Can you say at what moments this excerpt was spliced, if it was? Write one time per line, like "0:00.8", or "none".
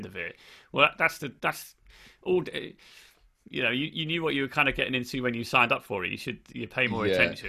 none